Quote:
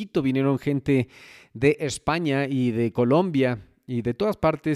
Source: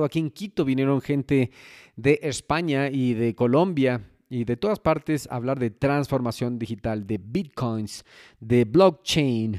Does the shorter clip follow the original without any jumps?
yes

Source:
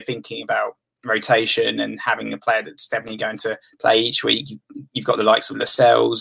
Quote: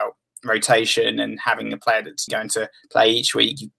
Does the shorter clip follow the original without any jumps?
no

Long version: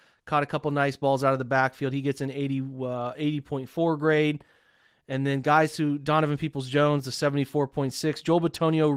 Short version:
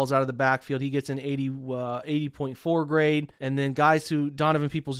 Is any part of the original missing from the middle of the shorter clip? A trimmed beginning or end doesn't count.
yes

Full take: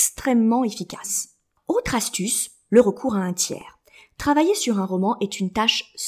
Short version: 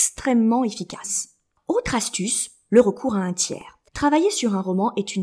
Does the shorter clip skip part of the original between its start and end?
yes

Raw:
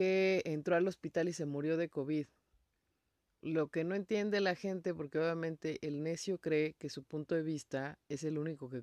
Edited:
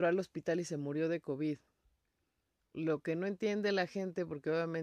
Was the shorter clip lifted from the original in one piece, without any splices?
yes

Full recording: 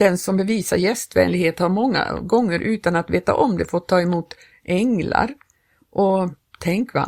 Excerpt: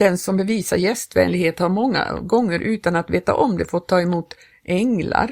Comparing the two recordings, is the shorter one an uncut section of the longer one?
yes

